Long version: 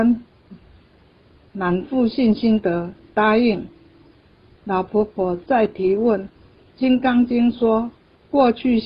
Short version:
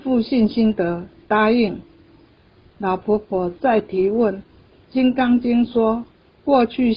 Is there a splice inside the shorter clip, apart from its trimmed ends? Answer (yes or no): no